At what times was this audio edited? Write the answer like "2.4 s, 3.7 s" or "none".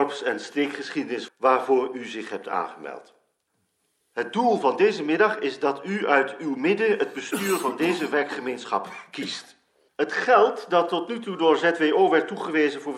1.3 s, 9.9 s